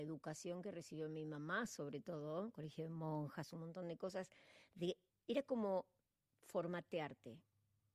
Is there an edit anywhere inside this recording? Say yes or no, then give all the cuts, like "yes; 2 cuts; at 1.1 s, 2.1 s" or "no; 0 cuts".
no; 0 cuts